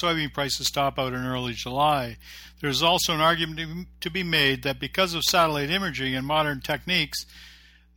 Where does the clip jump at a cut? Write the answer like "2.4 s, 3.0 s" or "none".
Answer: none